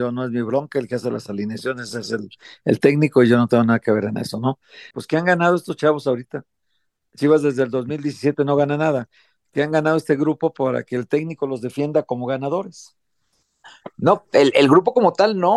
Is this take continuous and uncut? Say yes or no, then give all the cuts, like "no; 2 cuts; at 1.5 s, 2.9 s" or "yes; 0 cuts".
no; 1 cut; at 4.9 s